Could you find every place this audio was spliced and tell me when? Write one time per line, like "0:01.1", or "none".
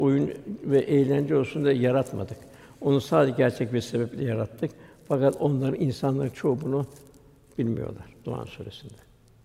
none